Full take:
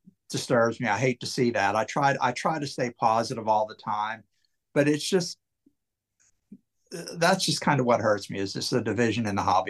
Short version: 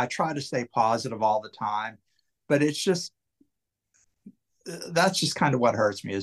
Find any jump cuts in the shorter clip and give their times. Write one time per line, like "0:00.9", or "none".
none